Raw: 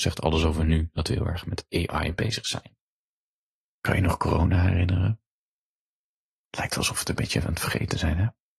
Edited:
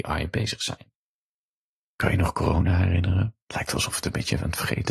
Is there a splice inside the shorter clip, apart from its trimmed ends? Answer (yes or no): yes